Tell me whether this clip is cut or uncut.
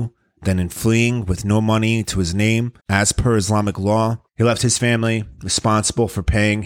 cut